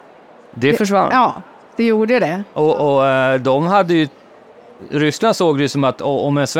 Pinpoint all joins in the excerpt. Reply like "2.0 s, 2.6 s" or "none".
none